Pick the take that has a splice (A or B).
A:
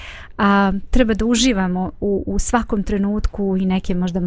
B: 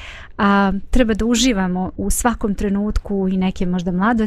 B